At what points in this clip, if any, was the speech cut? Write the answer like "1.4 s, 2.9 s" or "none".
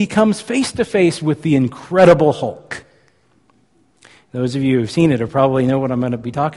none